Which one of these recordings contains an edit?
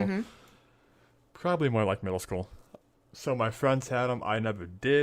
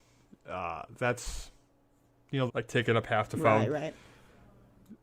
second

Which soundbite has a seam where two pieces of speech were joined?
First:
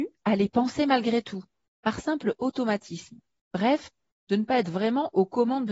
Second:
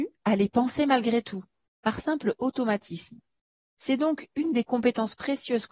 first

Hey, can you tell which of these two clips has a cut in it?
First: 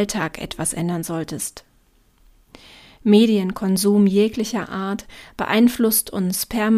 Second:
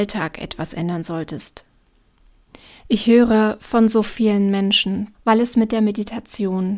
second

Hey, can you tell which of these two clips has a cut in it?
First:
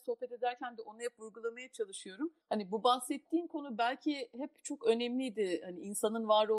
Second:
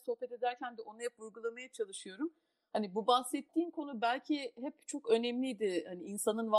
first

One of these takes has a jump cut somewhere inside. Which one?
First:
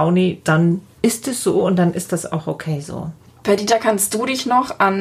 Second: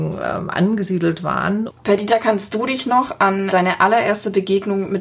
second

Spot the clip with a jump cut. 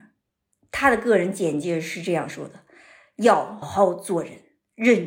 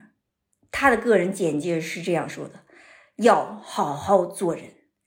first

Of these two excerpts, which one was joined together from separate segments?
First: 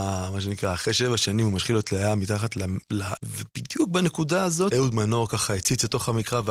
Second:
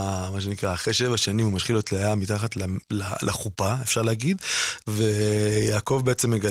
first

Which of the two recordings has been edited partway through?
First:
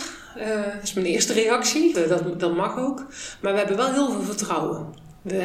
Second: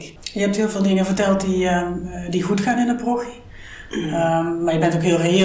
first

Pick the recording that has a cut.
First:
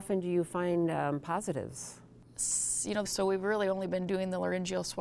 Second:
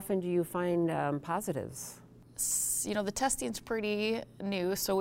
first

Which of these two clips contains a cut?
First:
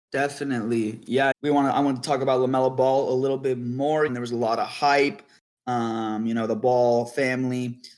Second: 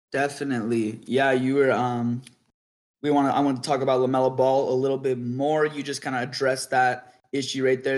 first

